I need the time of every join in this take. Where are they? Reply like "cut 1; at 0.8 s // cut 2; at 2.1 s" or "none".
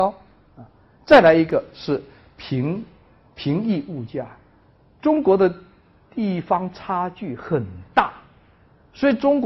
none